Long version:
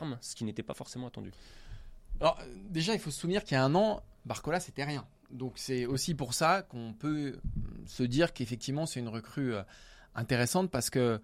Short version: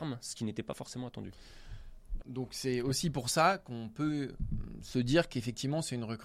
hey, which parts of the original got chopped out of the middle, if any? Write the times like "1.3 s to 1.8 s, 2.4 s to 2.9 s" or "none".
2.2 s to 5.2 s